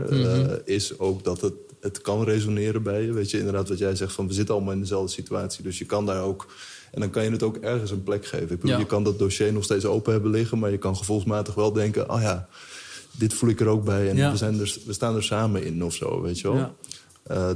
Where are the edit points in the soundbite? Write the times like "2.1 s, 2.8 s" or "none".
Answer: none